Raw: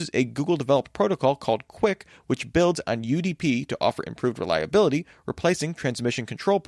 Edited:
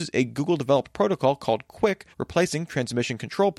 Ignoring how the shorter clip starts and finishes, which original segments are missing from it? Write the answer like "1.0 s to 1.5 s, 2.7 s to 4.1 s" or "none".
2.1 s to 5.2 s